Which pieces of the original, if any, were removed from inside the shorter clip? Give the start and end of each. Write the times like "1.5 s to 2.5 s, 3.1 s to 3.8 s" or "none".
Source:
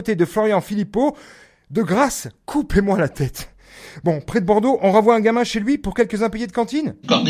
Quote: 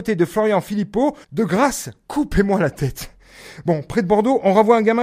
1.2 s to 1.6 s